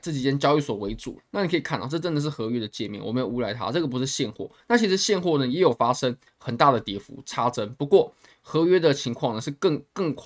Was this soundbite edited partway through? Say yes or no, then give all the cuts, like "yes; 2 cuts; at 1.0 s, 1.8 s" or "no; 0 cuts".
yes; 1 cut; at 1.2 s